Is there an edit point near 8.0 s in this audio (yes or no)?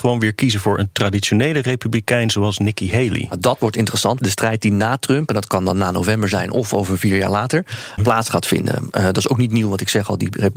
yes